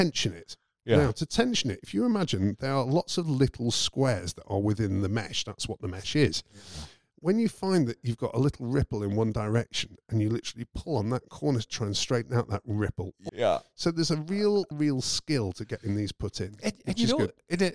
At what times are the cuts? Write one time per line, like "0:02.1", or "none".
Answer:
0:13.3
0:14.7